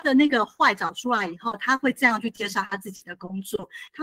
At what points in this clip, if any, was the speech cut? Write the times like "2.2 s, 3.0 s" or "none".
none